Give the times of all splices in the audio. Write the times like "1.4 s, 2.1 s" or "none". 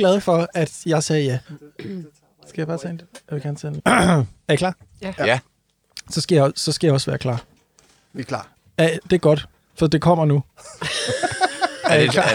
1.4 s